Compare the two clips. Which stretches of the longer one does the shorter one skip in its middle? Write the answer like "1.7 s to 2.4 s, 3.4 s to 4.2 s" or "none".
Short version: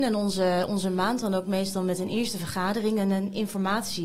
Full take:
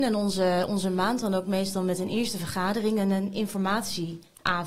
none